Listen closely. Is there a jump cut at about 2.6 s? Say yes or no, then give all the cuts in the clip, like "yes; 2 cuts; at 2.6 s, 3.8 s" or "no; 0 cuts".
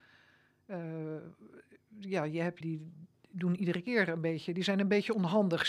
yes; 1 cut; at 2.6 s